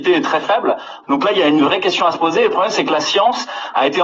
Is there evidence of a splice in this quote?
yes; 1 cut; at 1.0 s

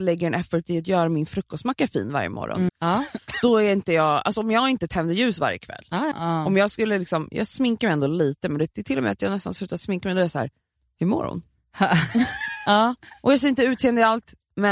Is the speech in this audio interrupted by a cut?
yes; 2 cuts; at 2.7 s, 6.1 s

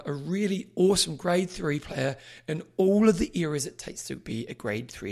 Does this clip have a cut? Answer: no; 0 cuts

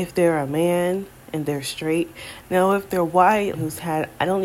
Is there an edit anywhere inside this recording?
yes; 2 cuts; at 2.4 s, 3.5 s

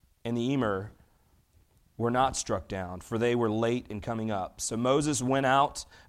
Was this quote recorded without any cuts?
yes; 0 cuts

